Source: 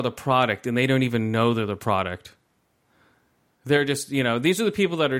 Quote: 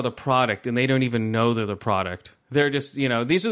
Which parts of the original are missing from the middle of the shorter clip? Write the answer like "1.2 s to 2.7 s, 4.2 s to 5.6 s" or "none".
2.4 s to 3.5 s